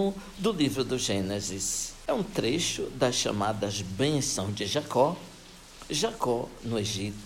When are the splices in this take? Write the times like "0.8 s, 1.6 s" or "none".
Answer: none